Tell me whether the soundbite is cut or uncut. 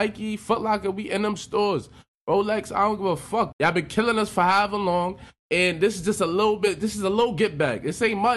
cut